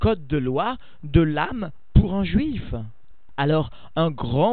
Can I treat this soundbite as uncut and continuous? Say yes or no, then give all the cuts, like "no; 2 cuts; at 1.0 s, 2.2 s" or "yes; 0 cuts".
yes; 0 cuts